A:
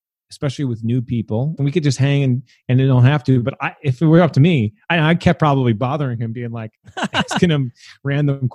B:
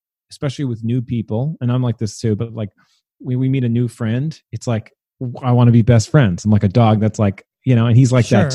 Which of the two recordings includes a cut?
A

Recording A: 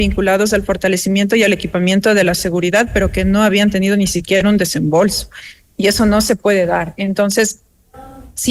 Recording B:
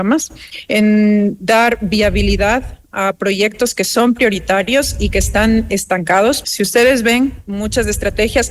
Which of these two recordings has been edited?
B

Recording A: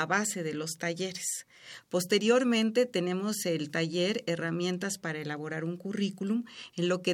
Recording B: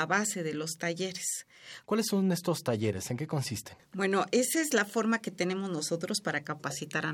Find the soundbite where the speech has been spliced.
B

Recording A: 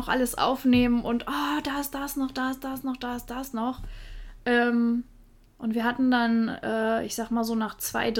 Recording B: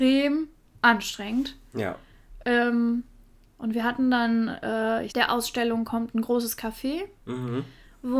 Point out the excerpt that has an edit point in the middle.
B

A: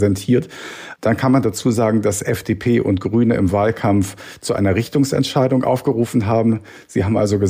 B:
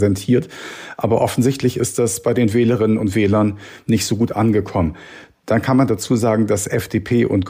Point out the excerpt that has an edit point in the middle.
A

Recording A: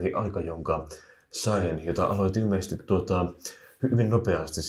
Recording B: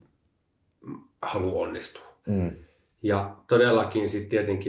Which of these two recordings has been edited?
B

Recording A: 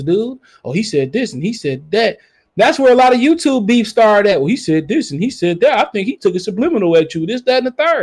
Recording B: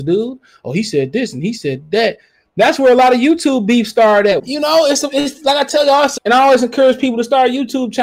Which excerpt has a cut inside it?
B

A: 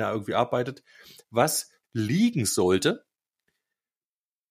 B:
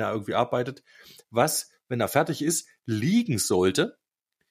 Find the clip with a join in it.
A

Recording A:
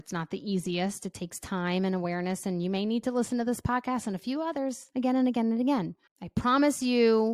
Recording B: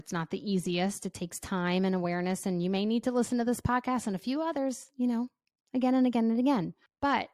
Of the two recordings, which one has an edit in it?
A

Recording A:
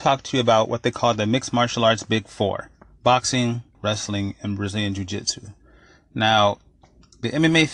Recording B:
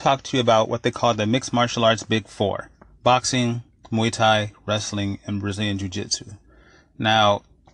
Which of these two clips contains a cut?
A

